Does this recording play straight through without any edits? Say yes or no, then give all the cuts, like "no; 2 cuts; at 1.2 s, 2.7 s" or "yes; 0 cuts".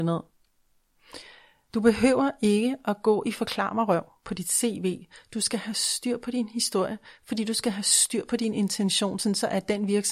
yes; 0 cuts